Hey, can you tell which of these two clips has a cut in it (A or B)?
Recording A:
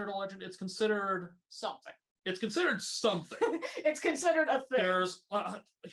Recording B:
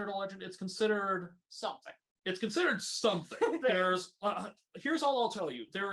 B